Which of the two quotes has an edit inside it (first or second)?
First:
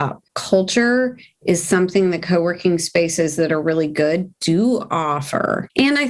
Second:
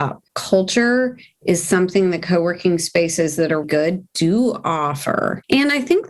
second